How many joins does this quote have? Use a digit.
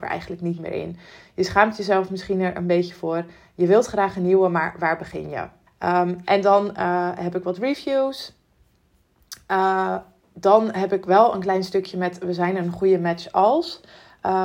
1